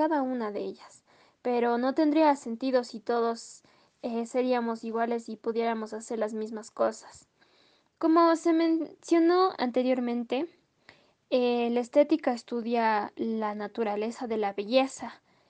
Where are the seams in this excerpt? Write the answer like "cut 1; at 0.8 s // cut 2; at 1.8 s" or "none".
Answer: cut 1; at 7.9 s